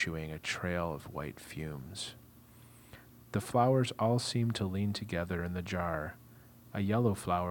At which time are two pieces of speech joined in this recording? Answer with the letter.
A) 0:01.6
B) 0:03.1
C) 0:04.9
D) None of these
B